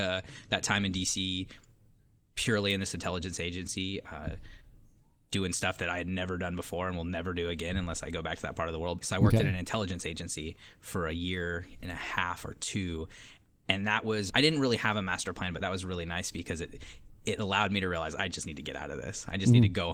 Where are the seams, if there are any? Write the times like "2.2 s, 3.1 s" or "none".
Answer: 9.0 s, 14.3 s